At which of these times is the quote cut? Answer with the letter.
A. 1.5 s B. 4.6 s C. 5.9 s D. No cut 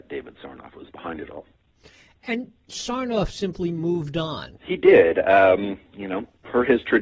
B